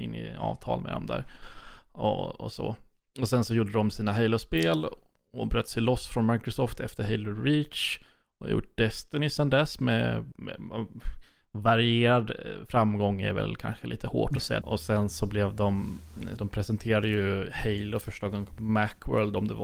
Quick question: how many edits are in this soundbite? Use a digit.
3